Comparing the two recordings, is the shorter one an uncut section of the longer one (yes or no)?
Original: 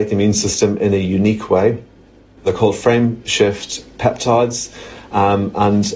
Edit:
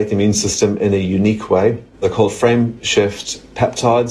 no